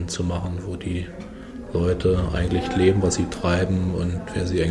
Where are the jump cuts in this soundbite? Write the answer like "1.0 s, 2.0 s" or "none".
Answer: none